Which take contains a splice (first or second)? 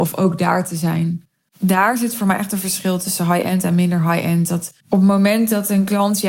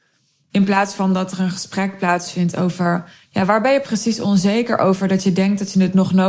first